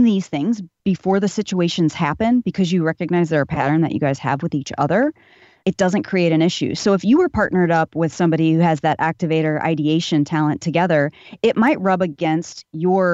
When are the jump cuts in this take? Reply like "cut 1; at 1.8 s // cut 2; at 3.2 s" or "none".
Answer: cut 1; at 5.6 s